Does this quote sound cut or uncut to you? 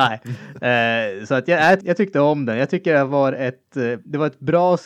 cut